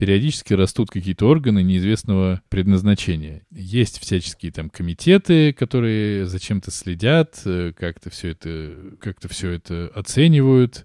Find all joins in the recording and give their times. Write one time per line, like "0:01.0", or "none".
0:03.4